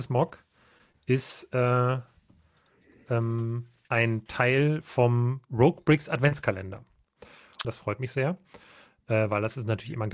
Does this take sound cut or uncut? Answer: cut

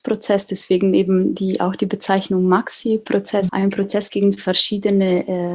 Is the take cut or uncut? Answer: cut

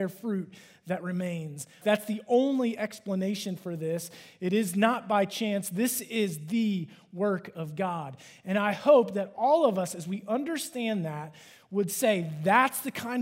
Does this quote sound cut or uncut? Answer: cut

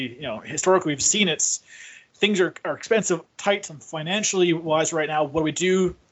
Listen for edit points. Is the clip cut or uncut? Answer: cut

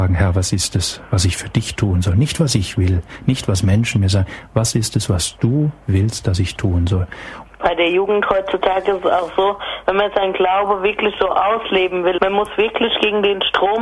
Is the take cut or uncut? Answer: cut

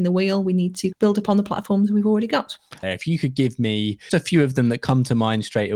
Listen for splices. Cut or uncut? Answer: cut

